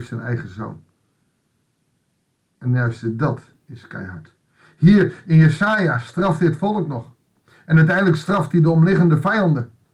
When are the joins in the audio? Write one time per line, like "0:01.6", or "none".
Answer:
none